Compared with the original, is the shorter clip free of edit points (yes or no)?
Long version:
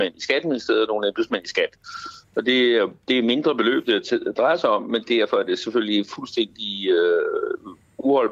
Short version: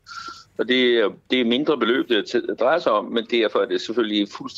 yes